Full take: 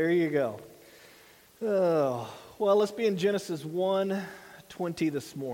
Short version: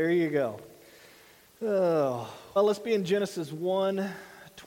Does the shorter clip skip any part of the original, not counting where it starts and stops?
yes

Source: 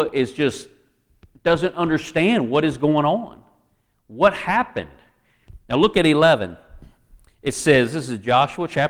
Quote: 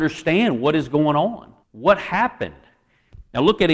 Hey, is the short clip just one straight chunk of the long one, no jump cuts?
no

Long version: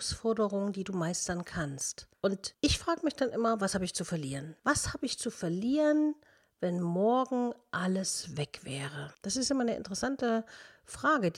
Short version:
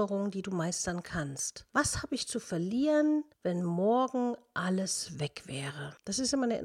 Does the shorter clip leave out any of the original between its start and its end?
yes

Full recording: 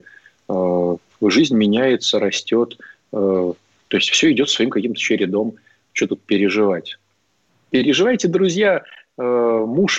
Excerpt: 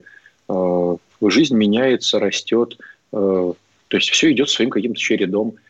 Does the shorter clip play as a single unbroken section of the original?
yes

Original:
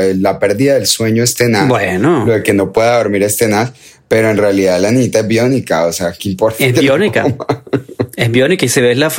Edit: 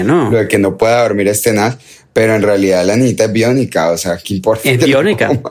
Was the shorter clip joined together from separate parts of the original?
no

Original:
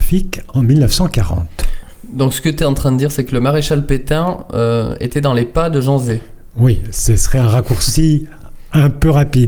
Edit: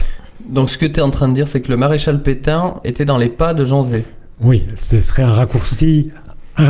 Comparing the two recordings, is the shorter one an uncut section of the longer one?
no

